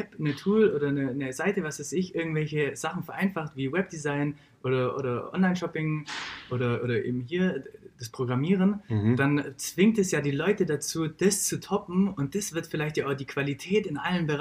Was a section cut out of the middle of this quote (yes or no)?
no